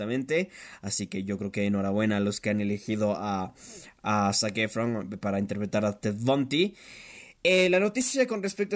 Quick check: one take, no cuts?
yes; 0 cuts

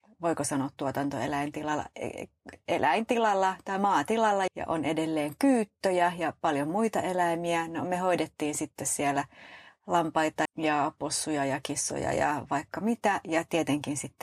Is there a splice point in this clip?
yes; 2 cuts; at 4.5 s, 10.5 s

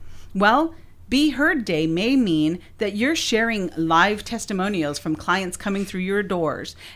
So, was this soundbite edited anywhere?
no; 0 cuts

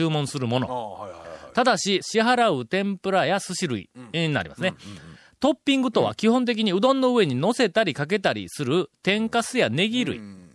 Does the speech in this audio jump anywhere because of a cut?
yes; 1 cut; at 2.0 s

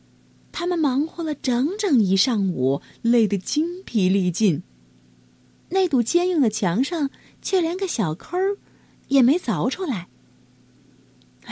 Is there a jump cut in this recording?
no; 0 cuts

